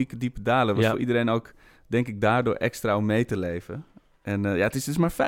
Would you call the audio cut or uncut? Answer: uncut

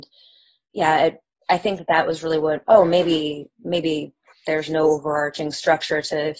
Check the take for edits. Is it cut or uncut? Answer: cut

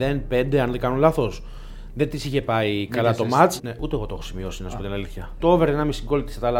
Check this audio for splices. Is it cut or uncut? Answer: cut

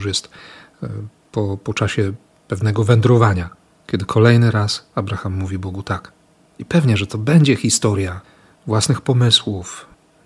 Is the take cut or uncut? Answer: uncut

